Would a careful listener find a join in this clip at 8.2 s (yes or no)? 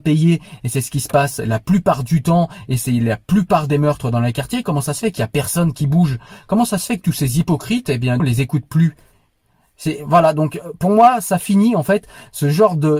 yes